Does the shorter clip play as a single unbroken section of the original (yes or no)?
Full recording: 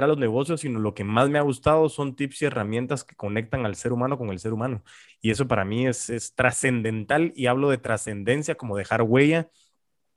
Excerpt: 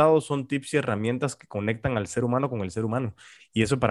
yes